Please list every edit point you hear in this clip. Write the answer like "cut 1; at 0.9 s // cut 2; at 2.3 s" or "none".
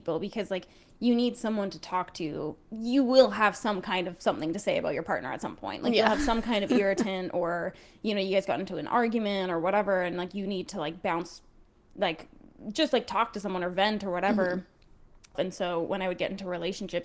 cut 1; at 15.3 s